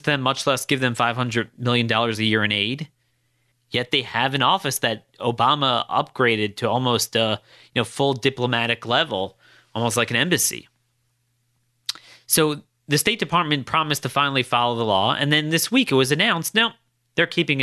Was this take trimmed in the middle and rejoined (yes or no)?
yes